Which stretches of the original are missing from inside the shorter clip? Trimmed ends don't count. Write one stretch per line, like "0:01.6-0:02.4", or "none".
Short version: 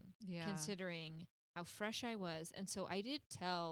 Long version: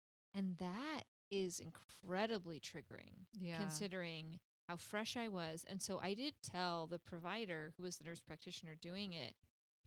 none